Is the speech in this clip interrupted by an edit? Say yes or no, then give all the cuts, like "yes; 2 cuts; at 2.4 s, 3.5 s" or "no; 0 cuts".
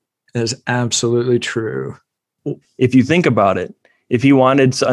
yes; 1 cut; at 2.6 s